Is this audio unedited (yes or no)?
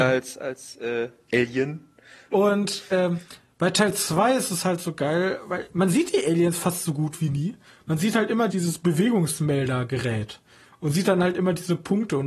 no